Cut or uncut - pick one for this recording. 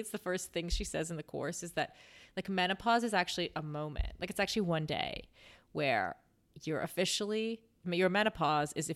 uncut